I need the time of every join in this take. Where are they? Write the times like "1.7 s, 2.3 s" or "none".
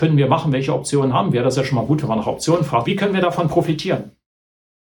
2.8 s